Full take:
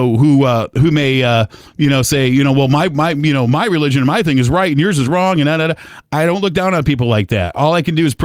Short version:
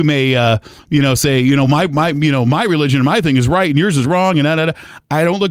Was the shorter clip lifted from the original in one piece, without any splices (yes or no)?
no